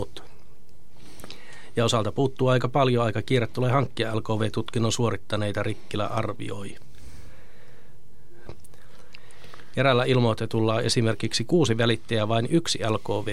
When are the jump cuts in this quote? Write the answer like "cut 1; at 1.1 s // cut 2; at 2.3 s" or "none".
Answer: cut 1; at 8.5 s // cut 2; at 9.7 s